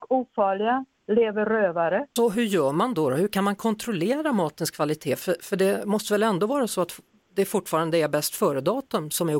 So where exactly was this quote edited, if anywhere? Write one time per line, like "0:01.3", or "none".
0:02.2

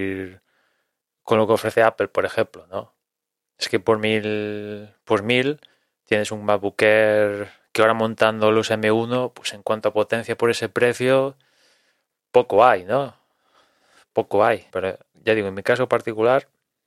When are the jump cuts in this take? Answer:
0:14.7

